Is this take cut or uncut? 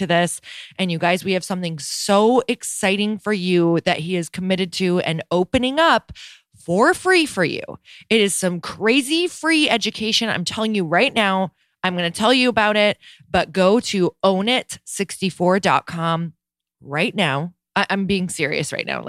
uncut